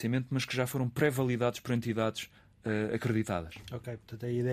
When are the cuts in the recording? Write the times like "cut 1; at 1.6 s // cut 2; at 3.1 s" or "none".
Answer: none